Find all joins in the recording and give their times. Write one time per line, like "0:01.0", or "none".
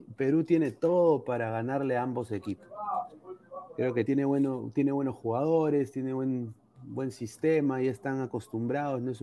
0:04.0